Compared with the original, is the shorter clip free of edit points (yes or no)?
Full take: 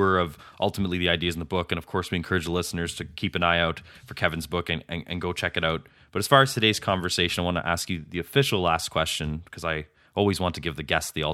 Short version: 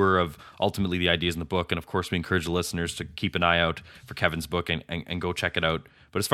yes